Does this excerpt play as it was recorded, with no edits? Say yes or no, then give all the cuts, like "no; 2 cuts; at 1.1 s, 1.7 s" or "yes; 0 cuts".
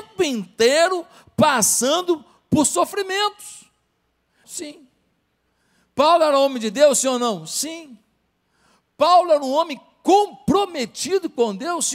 no; 1 cut; at 4.4 s